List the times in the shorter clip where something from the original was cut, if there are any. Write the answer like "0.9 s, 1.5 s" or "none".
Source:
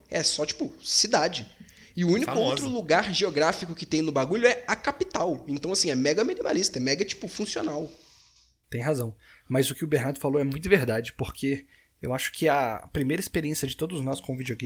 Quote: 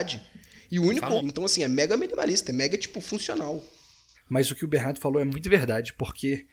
1.2 s, 4.1 s